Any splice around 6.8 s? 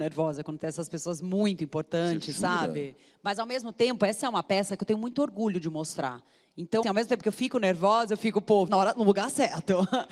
yes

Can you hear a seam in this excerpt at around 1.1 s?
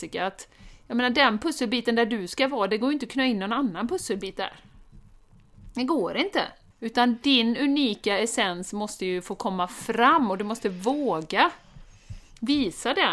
no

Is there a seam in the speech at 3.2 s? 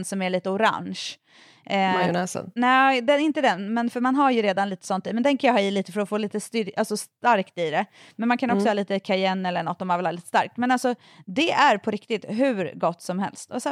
no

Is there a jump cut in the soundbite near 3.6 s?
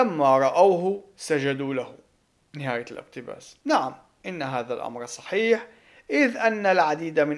yes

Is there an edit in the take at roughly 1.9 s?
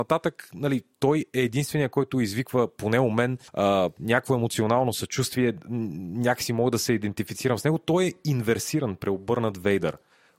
no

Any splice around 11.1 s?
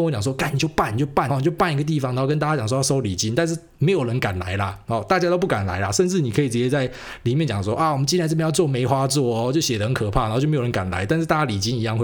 no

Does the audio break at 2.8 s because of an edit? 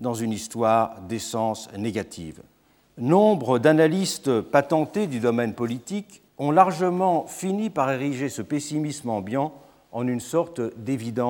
yes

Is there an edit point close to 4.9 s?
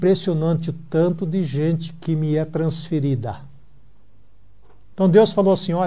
yes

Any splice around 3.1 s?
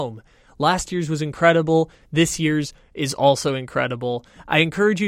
no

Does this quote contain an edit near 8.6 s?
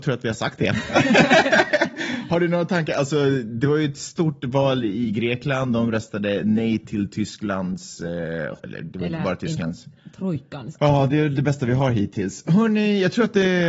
yes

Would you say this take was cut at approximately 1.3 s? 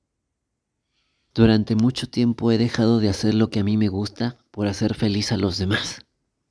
yes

